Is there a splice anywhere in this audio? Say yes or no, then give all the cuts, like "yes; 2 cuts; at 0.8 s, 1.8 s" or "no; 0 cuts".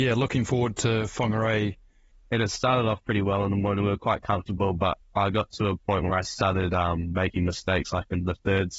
yes; 1 cut; at 2.1 s